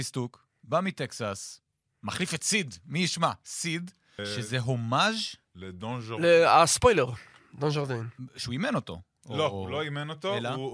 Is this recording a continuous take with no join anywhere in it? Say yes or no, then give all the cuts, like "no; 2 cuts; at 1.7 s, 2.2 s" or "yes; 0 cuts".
no; 1 cut; at 4.2 s